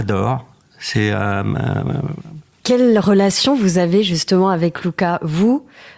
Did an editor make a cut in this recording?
yes; 1 cut; at 2.6 s

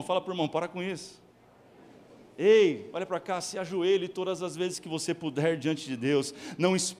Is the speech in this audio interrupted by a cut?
no; 0 cuts

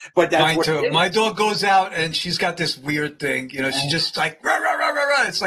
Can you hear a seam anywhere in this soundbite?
no; 0 cuts

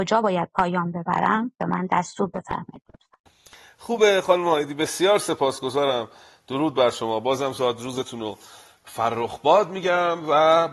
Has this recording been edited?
no; 0 cuts

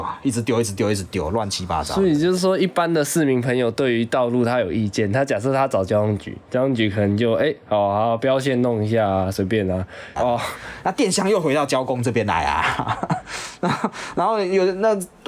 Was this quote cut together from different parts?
yes; 1 cut; at 10.2 s

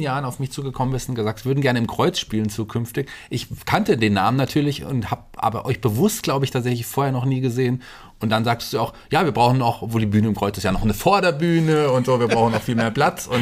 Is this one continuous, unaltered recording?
yes; 0 cuts

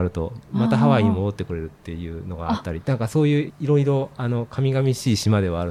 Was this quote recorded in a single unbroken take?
no; 1 cut; at 3.5 s

